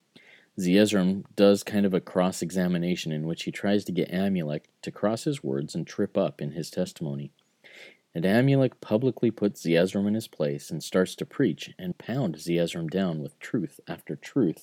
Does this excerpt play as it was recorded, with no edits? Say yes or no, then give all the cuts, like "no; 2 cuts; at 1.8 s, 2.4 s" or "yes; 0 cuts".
no; 2 cuts; at 8.0 s, 11.9 s